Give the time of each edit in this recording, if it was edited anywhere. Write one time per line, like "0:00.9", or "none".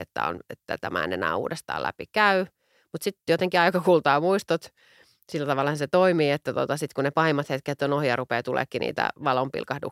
none